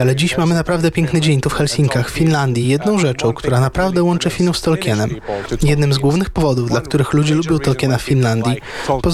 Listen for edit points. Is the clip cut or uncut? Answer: uncut